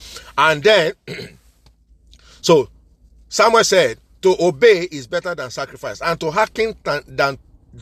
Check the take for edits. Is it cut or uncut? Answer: uncut